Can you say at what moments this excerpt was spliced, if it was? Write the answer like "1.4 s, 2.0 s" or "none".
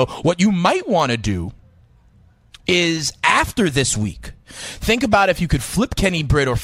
none